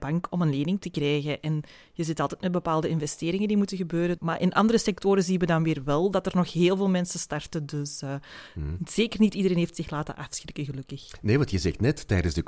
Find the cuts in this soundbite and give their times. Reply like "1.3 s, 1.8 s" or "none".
4.2 s